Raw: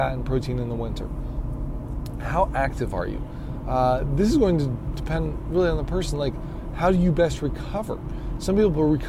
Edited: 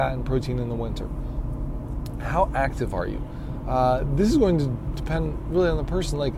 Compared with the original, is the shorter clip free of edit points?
yes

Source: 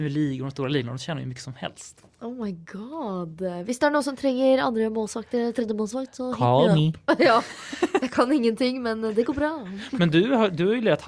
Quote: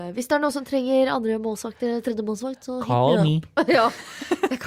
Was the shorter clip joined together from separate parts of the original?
no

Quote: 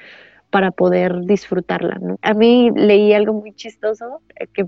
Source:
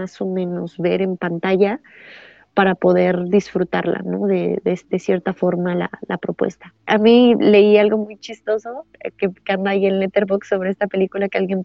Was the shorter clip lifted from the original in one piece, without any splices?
no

